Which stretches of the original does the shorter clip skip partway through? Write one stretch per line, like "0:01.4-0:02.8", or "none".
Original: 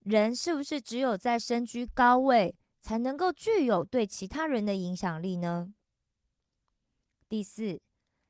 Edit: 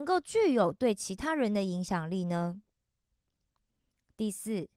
none